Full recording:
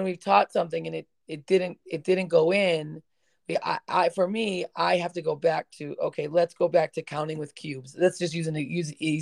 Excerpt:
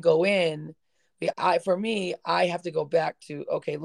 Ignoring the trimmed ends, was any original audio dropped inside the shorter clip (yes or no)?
yes